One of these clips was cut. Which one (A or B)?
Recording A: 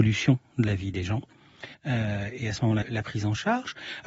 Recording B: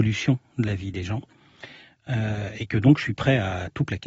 A